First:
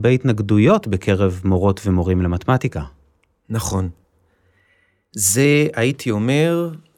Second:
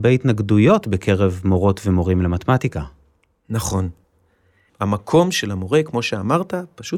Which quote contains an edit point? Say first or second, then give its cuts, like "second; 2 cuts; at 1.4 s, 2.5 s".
second; 1 cut; at 4.7 s